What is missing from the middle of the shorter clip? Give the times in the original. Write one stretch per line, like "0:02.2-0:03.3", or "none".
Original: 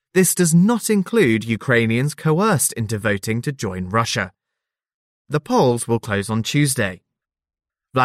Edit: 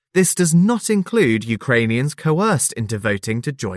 none